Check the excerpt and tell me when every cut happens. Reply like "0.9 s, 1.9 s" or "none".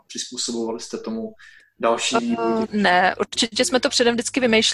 2.6 s